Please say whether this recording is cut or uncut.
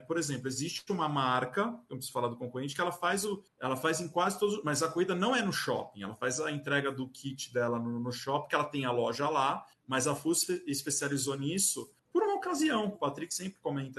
cut